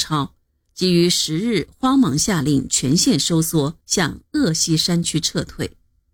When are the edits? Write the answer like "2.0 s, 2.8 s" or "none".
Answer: 3.8 s